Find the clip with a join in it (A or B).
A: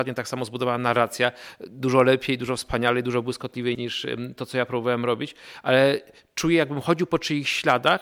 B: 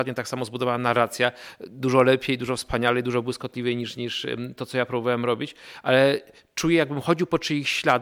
A